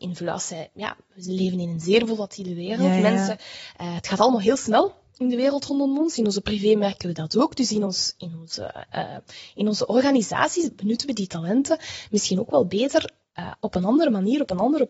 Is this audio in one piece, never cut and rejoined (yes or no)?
yes